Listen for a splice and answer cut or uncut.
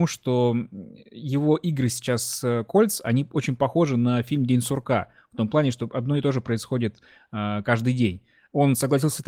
uncut